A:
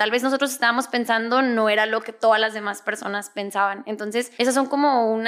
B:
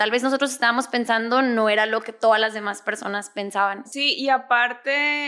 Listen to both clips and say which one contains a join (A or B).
B